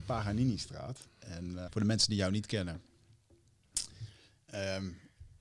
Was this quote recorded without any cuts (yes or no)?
no